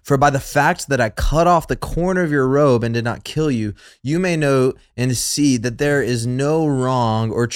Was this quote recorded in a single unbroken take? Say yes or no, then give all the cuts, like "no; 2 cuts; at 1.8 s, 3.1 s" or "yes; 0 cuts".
yes; 0 cuts